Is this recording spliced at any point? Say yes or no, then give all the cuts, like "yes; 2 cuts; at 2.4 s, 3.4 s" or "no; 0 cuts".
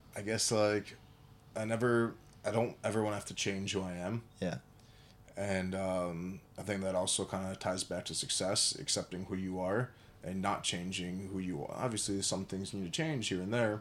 no; 0 cuts